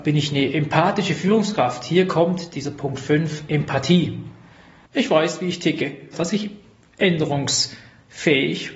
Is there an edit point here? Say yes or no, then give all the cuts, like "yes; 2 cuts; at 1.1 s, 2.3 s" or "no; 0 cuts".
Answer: yes; 2 cuts; at 4.9 s, 6.1 s